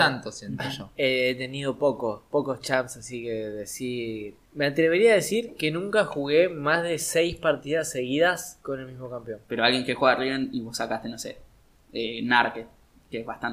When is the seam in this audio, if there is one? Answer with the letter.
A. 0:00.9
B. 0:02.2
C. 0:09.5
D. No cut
C